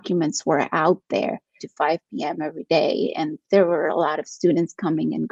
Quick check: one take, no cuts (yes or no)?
no